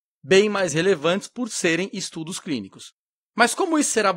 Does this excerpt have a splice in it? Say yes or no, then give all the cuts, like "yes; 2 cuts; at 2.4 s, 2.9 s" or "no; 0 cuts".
no; 0 cuts